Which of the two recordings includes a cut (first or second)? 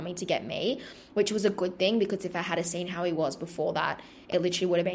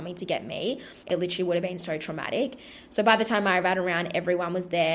second